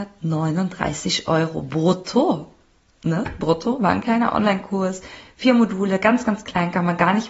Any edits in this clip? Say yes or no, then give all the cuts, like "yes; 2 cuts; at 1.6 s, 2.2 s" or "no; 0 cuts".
no; 0 cuts